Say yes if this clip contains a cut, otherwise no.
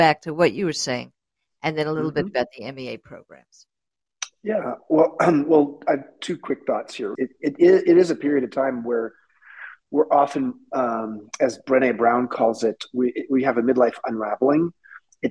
yes